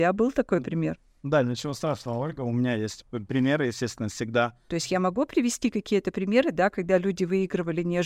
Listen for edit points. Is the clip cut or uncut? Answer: cut